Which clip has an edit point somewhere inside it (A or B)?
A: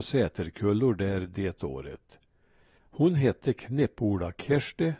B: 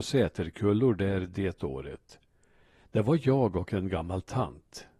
A